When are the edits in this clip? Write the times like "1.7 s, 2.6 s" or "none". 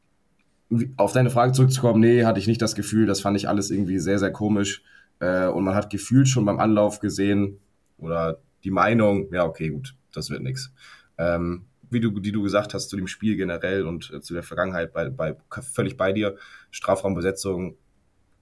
11.9 s